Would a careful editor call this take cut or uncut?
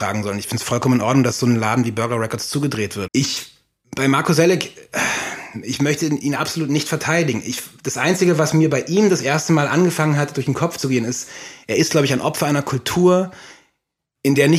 cut